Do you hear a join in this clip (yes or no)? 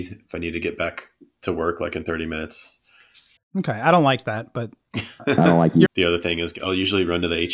yes